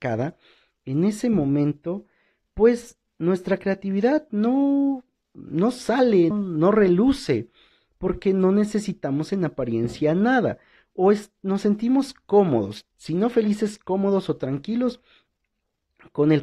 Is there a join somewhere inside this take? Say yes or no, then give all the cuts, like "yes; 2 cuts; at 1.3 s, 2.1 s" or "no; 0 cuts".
yes; 1 cut; at 6.3 s